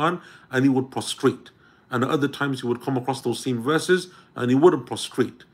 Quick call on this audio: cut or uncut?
uncut